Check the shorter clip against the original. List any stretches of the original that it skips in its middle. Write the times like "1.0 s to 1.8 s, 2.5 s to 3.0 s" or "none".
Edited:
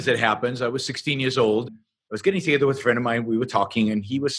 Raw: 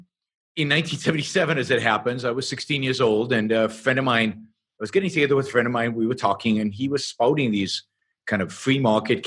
3.3 s to 4.3 s